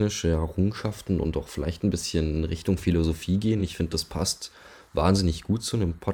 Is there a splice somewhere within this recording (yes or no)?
no